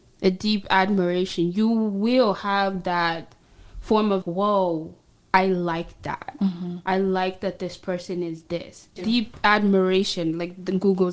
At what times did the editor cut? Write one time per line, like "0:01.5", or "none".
0:04.2
0:09.0